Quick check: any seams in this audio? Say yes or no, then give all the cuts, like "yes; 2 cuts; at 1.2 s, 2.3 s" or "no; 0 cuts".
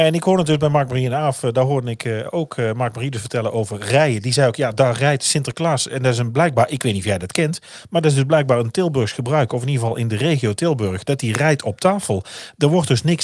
no; 0 cuts